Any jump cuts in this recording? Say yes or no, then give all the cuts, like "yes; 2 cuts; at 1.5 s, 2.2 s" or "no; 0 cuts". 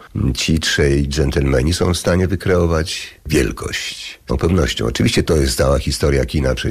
yes; 1 cut; at 4.3 s